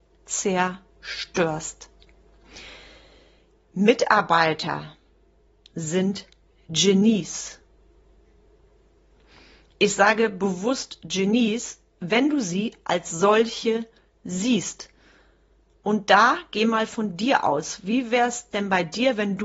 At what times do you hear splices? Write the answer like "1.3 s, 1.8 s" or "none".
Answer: none